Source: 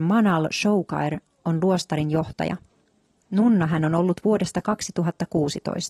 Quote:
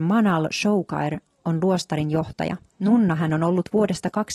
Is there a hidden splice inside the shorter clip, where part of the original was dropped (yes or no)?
yes